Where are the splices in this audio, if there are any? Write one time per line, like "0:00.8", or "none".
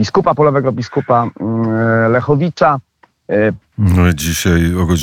0:03.6

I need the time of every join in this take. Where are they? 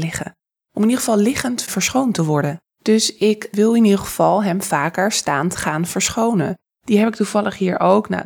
0:06.7

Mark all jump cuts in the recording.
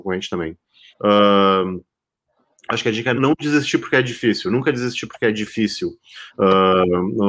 0:00.9
0:03.1
0:06.3

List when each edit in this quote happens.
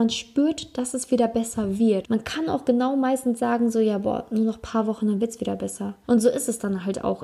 0:02.0
0:06.0

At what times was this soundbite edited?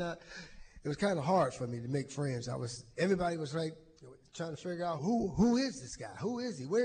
0:02.9
0:05.0

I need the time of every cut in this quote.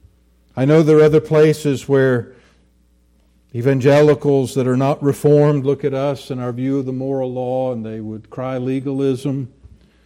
none

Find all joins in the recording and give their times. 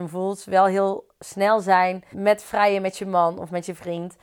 0:02.1

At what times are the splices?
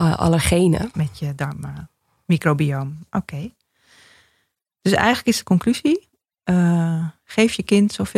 0:00.9

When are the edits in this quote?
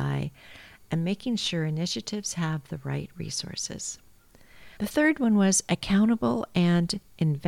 0:04.8

